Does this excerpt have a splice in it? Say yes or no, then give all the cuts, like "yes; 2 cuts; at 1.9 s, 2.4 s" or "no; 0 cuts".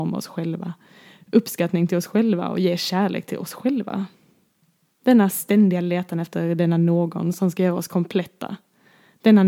yes; 1 cut; at 4.9 s